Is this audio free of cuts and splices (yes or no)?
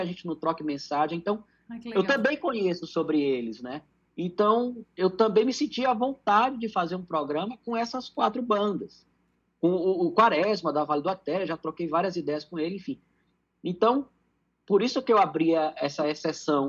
yes